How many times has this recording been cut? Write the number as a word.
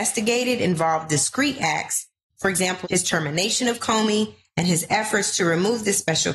one